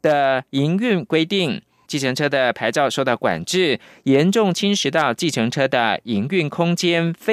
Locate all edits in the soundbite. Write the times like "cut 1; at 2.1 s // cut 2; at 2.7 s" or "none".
cut 1; at 1.9 s